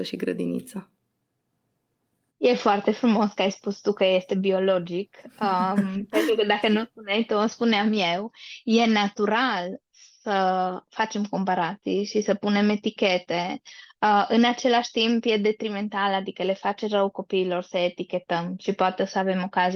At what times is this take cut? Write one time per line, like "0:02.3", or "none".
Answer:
none